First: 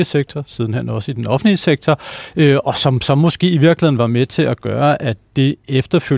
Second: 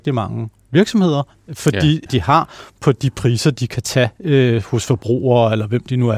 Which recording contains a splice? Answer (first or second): second